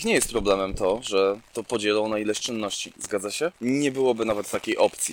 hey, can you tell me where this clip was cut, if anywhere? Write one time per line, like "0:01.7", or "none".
0:02.9